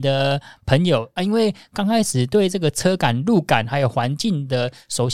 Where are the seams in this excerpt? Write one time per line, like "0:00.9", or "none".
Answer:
0:01.2

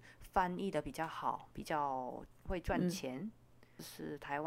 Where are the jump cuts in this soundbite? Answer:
none

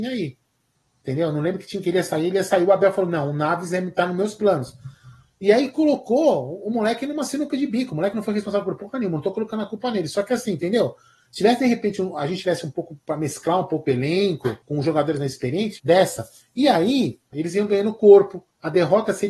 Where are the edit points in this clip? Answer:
0:14.6
0:15.8
0:17.3

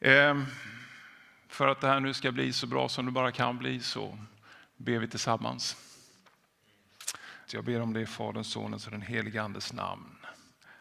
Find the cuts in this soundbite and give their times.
0:07.5

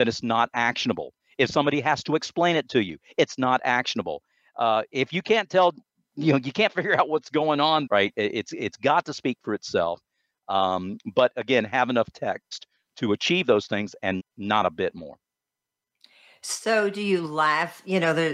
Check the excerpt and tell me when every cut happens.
0:07.9
0:14.2

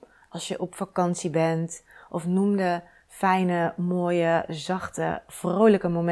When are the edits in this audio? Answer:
none

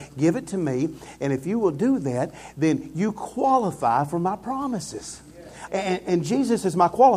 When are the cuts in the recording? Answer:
0:05.7

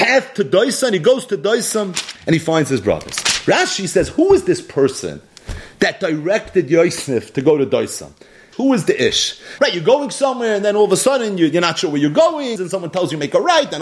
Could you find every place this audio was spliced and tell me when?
0:08.5
0:09.6
0:12.6

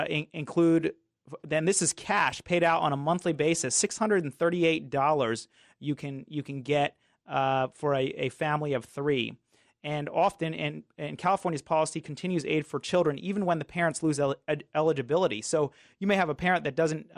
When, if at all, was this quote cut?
none

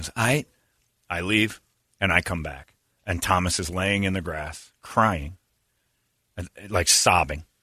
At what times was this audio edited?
none

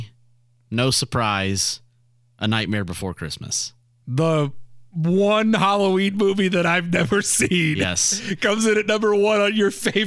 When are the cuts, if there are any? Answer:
none

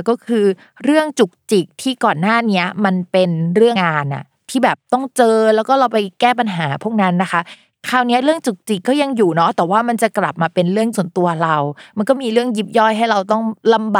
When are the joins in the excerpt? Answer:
0:03.8

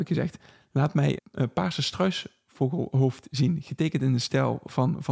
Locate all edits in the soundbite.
0:01.2

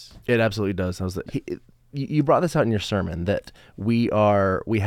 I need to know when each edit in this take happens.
0:01.3

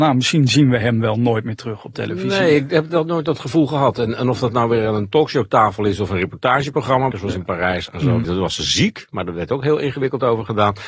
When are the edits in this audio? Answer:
0:07.1
0:08.2

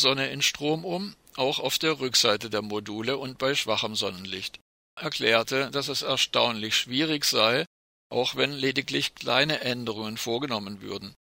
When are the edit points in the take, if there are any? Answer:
0:05.0
0:07.9

